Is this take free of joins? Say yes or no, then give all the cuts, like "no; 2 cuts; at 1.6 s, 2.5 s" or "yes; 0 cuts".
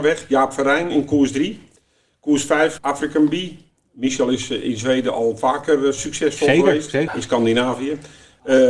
no; 2 cuts; at 2.8 s, 7.1 s